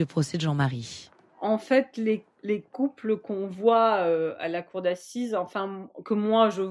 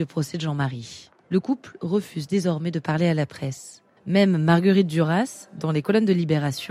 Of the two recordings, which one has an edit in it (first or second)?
second